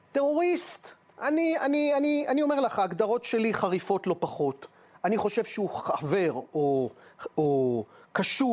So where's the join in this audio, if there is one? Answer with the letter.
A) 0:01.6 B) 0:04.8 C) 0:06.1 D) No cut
D